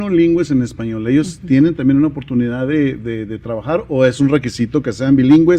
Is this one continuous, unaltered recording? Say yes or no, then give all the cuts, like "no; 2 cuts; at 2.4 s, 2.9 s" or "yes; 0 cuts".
yes; 0 cuts